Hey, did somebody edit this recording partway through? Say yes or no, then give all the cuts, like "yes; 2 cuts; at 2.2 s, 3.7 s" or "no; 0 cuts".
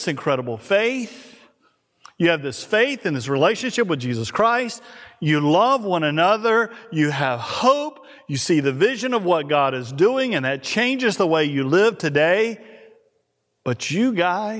no; 0 cuts